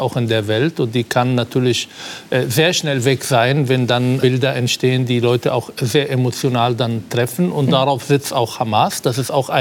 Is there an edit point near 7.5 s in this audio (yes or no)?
no